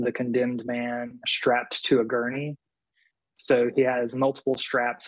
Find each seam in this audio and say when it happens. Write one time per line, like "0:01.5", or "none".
0:01.2